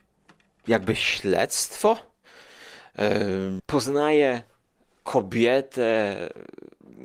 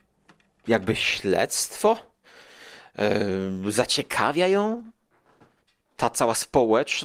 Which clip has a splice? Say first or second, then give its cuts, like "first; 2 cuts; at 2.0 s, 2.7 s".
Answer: first; 1 cut; at 3.6 s